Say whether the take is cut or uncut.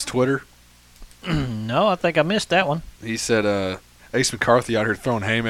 uncut